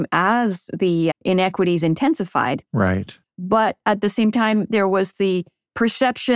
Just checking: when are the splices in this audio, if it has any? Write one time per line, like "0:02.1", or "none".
0:01.1
0:03.2